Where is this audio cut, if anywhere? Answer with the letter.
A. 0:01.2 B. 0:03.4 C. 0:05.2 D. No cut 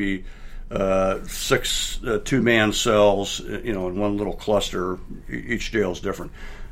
D